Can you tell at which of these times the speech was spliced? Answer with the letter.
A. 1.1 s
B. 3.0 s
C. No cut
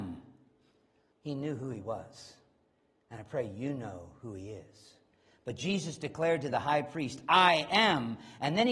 A